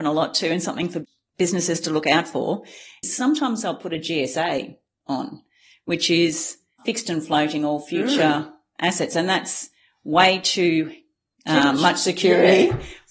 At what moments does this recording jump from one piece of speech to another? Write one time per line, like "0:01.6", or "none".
0:03.0